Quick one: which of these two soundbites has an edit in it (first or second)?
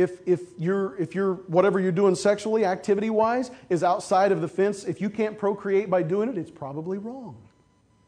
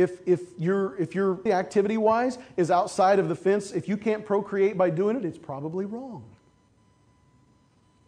second